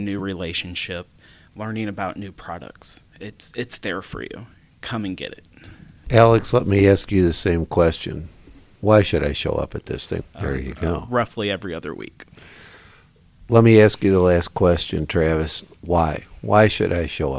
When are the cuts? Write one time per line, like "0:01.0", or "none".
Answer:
0:10.2